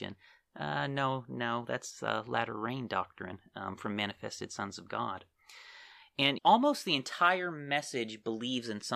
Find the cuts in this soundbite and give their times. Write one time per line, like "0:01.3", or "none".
0:06.4